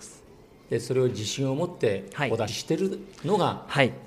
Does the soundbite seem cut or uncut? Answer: cut